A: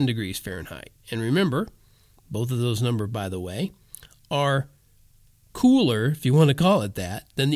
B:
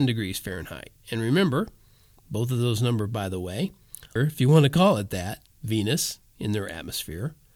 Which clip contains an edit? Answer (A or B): B